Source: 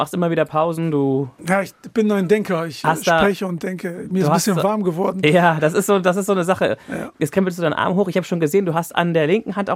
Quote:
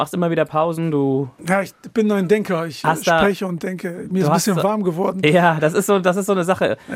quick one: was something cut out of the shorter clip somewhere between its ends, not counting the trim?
no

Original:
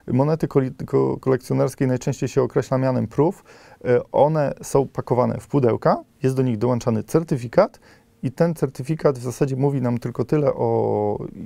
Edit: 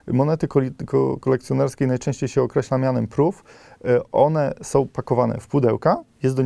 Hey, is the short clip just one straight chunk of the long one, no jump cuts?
yes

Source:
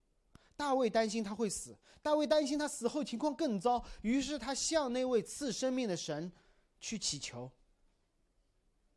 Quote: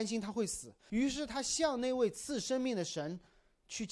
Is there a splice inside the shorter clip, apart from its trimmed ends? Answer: yes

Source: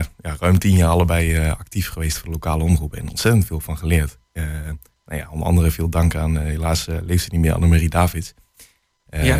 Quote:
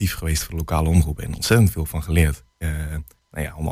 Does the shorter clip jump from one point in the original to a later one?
no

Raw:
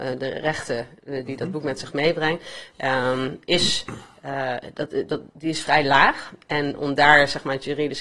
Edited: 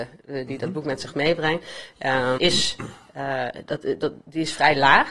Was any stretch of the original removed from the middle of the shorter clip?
yes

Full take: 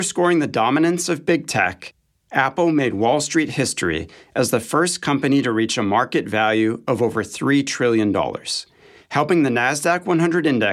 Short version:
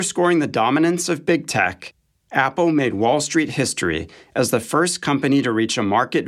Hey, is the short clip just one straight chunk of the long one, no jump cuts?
yes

